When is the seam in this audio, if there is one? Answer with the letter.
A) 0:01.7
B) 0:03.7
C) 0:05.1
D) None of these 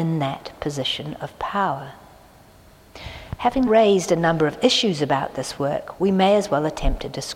B